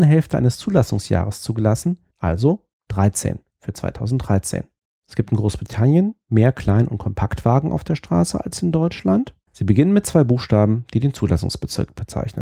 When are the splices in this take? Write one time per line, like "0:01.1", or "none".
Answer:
0:02.1
0:05.0
0:09.5